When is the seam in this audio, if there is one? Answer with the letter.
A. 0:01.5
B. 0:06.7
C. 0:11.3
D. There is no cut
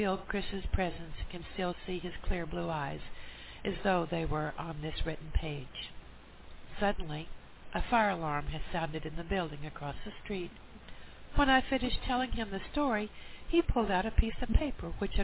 C